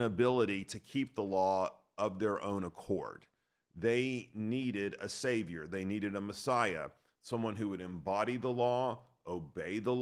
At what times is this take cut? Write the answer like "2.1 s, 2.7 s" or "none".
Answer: none